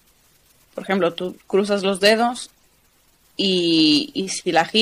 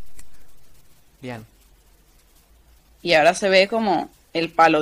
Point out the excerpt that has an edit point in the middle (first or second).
second